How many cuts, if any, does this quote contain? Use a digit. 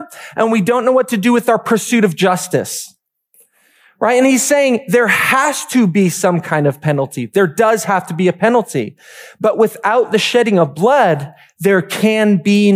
0